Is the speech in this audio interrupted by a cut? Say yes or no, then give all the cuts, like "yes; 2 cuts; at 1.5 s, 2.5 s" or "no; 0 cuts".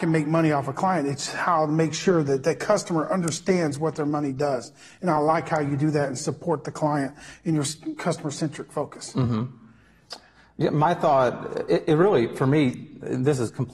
no; 0 cuts